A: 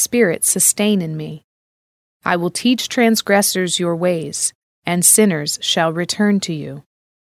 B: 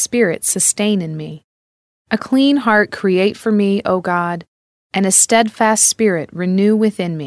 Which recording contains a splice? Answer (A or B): B